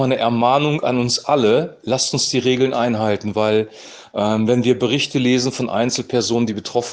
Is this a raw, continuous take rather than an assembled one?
yes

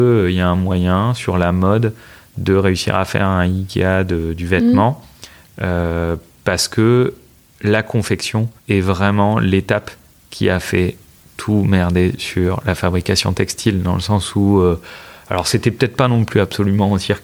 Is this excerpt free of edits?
no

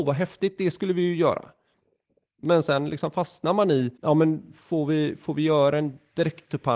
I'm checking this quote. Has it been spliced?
yes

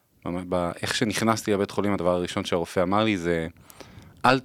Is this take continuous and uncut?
yes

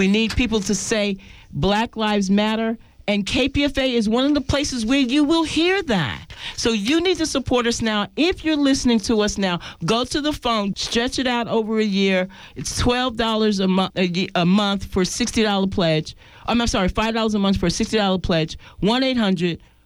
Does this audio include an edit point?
yes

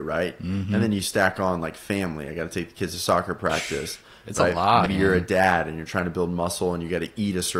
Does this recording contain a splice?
yes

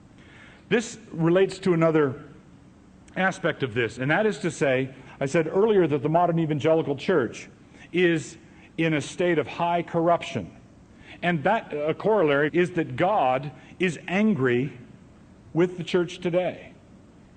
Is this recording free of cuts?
no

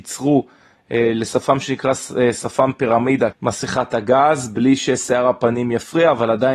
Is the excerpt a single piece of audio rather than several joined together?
no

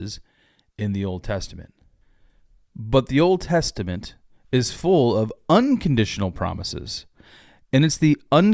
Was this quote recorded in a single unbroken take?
yes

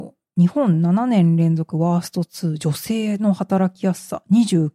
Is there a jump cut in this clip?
no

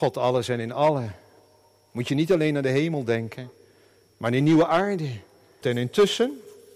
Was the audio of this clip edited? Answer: yes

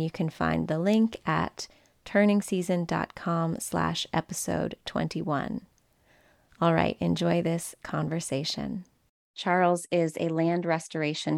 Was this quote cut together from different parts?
yes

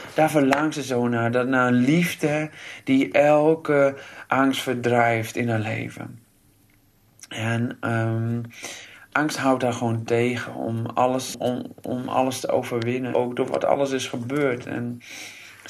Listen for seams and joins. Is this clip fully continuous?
no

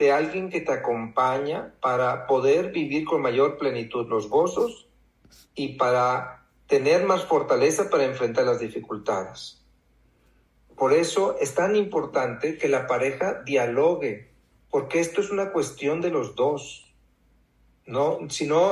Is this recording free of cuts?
yes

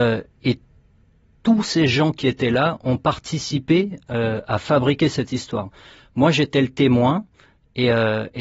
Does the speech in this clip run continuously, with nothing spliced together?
yes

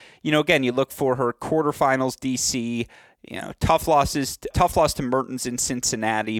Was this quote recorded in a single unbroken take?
no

